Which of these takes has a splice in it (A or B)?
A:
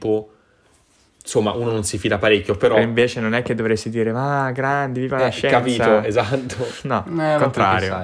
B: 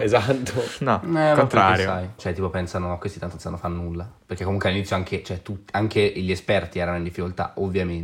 B